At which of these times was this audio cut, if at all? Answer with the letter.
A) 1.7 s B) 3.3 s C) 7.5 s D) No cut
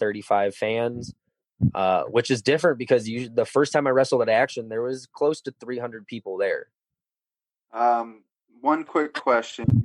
C